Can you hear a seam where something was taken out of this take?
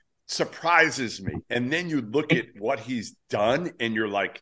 no; 0 cuts

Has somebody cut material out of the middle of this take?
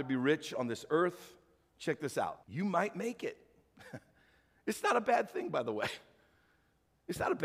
yes; 1 cut; at 2.4 s

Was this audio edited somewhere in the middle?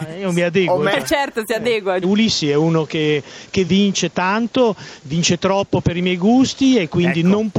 yes; 2 cuts; at 2.0 s, 3.7 s

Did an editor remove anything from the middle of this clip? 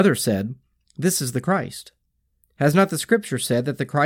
yes; 1 cut; at 2.4 s

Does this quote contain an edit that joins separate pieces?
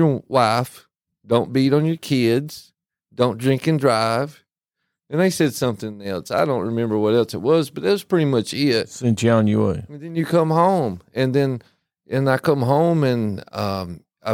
no; 0 cuts

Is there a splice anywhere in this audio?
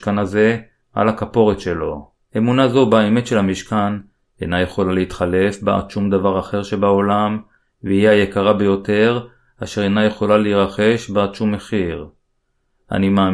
yes; 1 cut; at 2.2 s

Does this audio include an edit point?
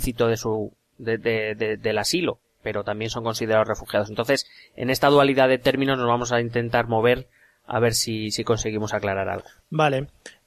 no; 0 cuts

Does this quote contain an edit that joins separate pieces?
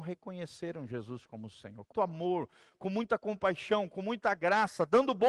yes; 1 cut; at 1.9 s

